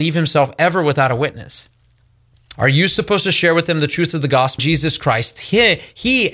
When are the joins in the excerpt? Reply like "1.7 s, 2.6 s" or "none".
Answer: 2.5 s, 4.6 s